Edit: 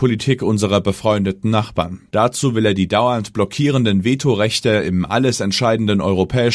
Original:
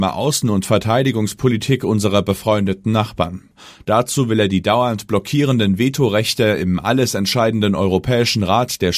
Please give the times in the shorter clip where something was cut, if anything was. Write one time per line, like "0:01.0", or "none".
0:02.1